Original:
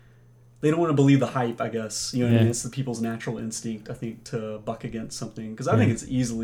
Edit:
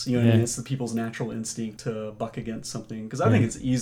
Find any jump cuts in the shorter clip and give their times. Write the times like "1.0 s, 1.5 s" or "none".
1.8 s